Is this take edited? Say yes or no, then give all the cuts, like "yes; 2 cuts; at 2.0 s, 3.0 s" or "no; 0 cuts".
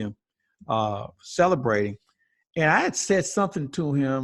no; 0 cuts